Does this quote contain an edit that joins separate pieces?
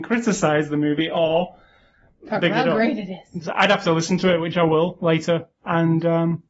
yes; 2 cuts; at 3.4 s, 5.6 s

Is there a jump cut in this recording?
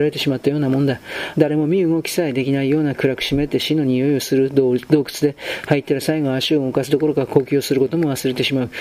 yes; 1 cut; at 1.3 s

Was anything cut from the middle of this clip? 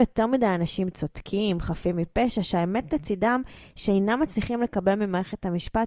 no; 0 cuts

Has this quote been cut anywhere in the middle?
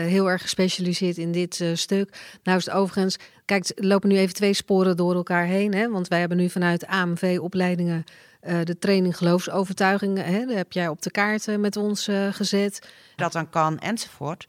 yes; 1 cut; at 13.2 s

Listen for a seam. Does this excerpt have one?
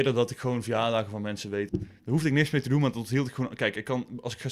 yes; 1 cut; at 1.7 s

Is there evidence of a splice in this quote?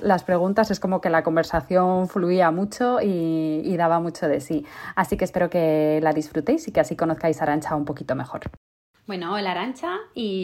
no; 0 cuts

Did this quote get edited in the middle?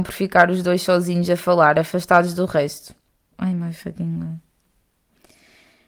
yes; 1 cut; at 3.3 s

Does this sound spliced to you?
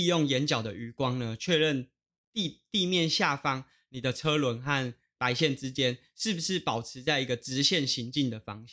no; 0 cuts

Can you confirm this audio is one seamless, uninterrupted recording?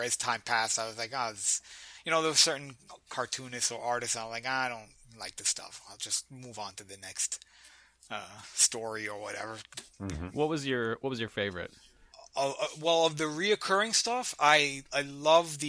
yes; 0 cuts

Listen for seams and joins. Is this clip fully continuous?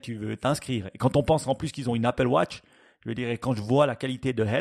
yes; 0 cuts

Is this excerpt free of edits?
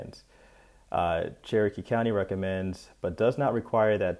yes; 0 cuts

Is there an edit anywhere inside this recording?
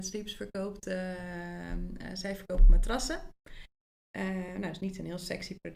no; 0 cuts

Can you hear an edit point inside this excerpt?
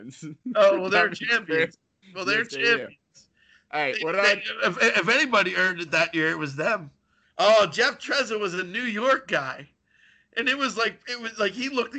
yes; 1 cut; at 7.2 s

